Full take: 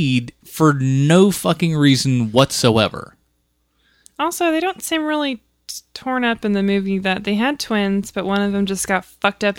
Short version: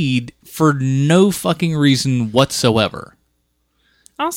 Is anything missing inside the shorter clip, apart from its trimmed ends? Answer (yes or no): no